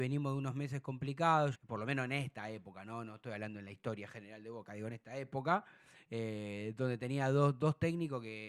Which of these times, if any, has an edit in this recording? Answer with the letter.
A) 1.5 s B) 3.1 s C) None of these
A